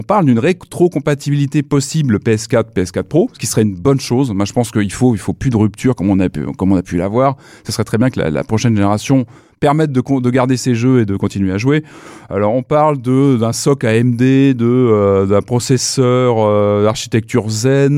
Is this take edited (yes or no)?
no